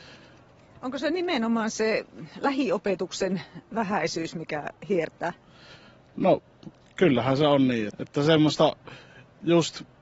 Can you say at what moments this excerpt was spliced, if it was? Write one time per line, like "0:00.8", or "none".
0:07.9